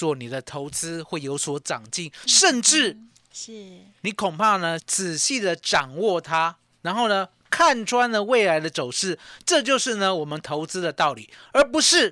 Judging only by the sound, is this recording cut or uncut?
cut